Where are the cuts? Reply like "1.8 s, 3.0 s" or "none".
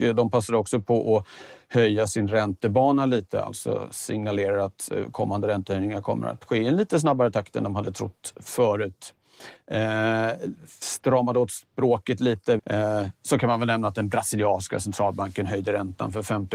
9.6 s, 12.6 s